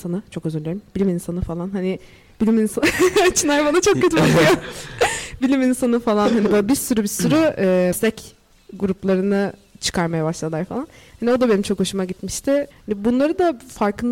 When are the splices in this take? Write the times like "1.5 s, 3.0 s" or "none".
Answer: 12.7 s